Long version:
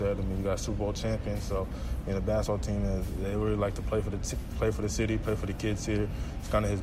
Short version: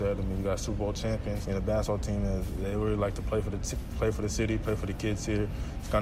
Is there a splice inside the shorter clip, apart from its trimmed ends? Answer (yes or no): yes